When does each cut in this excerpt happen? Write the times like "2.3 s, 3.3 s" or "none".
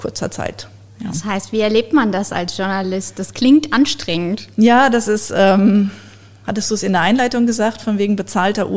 none